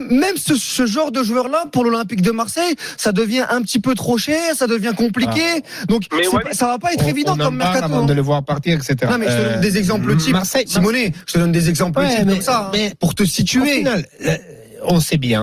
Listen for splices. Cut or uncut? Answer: uncut